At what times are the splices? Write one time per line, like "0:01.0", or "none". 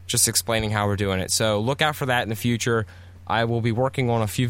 none